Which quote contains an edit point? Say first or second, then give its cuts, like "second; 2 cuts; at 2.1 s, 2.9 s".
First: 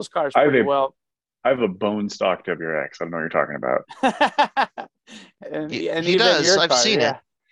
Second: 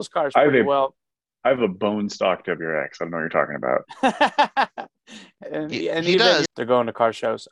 second; 1 cut; at 6.4 s